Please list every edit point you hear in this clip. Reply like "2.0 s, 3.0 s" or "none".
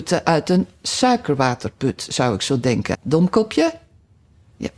2.9 s